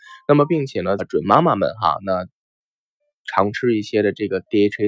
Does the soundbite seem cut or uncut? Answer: cut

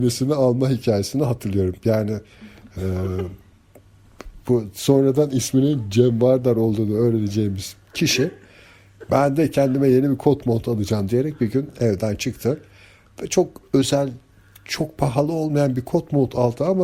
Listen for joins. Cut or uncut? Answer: uncut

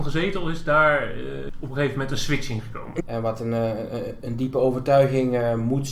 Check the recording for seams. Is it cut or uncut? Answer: cut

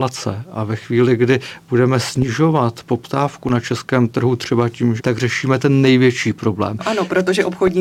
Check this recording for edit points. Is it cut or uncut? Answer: cut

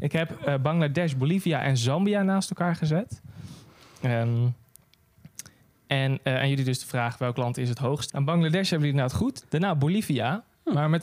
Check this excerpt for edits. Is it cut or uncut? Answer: cut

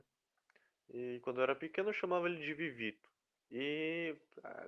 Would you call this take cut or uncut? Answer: cut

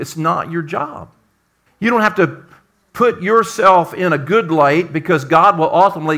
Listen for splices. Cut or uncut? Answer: cut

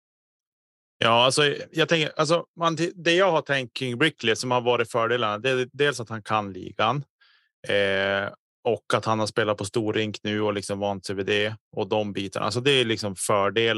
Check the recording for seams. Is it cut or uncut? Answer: uncut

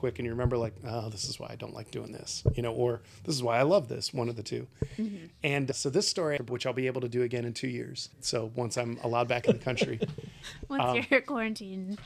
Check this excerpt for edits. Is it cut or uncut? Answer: cut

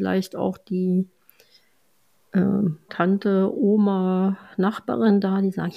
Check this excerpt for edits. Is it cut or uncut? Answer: cut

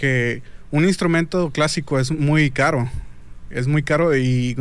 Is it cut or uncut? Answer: uncut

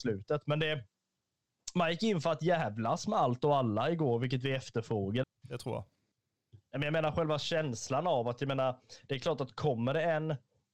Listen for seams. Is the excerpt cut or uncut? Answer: cut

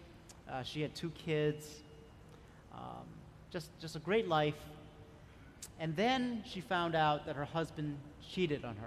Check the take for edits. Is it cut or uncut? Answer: uncut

